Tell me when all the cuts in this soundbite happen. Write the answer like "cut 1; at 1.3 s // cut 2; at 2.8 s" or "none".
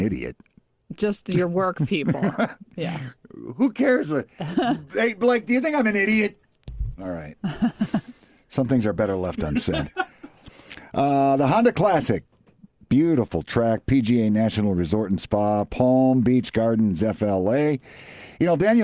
cut 1; at 6.9 s